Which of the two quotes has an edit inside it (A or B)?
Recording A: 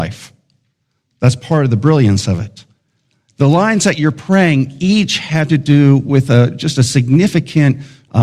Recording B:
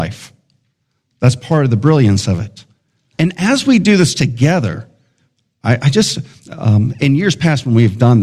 B